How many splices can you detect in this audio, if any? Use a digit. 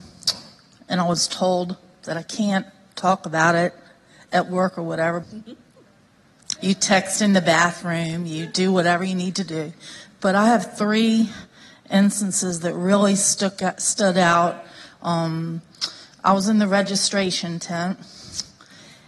2